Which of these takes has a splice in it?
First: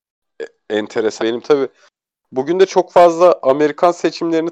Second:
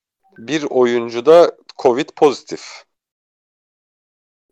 first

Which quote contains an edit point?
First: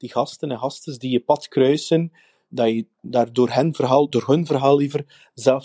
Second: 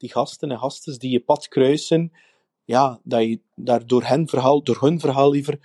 first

